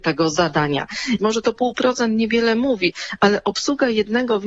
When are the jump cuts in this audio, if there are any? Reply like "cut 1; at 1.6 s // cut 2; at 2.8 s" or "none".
cut 1; at 1.2 s